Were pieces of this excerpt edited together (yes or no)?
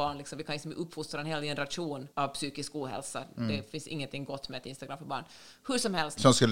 yes